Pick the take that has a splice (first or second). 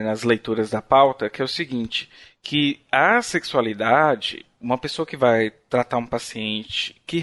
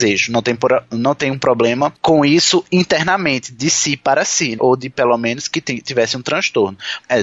second